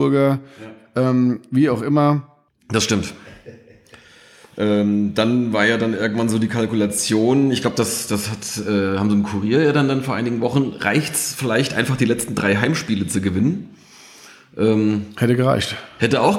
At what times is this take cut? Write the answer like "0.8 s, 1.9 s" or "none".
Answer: 2.5 s

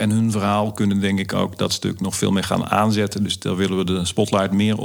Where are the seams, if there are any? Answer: none

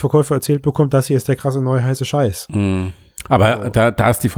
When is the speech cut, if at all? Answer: none

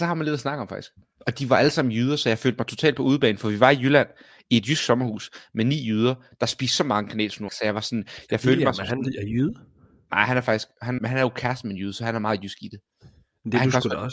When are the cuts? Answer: 7.5 s, 11.0 s

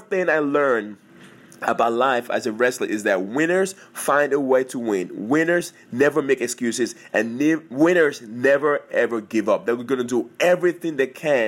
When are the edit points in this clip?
8.9 s

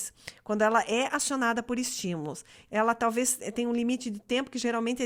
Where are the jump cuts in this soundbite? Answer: 2.7 s

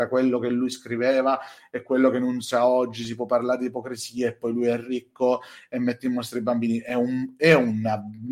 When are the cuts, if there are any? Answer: none

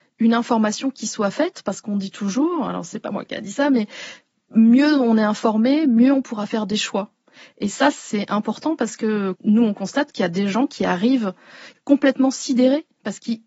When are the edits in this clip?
9.3 s, 11.7 s

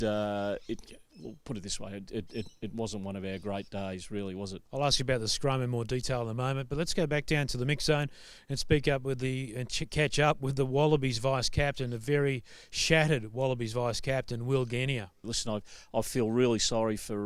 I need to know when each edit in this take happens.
4.7 s, 15.2 s

